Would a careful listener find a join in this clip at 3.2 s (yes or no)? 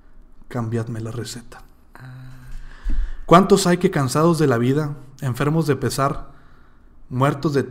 no